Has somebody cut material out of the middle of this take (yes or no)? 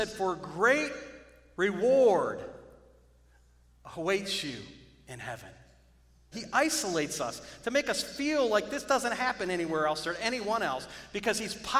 yes